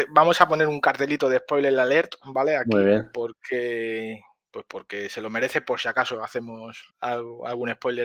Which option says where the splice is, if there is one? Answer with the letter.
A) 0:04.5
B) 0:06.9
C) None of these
B